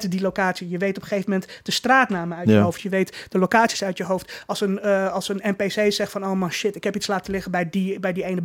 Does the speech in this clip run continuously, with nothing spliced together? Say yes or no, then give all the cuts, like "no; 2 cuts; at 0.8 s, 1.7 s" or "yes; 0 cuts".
yes; 0 cuts